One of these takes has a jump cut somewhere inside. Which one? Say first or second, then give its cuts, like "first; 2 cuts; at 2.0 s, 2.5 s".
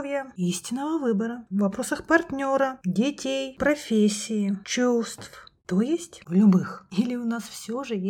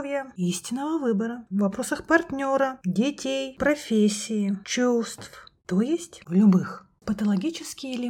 first; 1 cut; at 6.9 s